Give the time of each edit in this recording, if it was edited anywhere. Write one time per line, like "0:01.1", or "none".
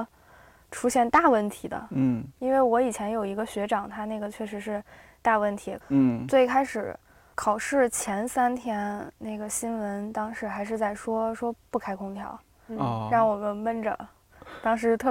0:05.8